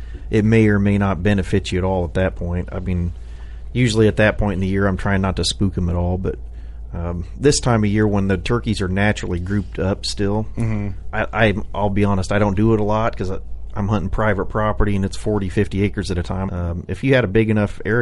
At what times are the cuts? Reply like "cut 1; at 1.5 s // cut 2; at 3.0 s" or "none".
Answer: cut 1; at 11.1 s // cut 2; at 16.5 s